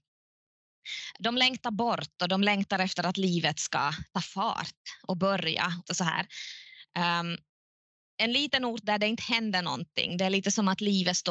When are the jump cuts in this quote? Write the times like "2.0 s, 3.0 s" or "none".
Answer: 5.8 s